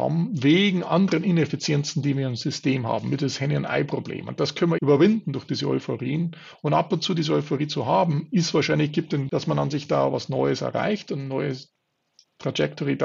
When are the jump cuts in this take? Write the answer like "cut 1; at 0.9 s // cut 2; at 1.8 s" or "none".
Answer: cut 1; at 4.8 s // cut 2; at 9.3 s